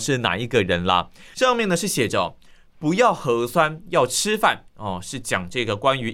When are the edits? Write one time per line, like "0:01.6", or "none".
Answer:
0:01.3